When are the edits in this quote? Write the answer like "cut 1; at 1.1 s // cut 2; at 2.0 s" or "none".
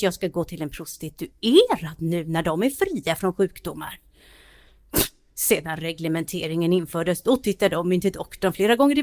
none